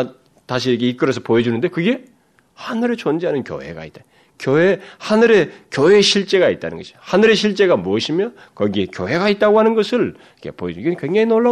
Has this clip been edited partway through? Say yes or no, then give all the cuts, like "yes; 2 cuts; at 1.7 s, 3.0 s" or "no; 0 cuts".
no; 0 cuts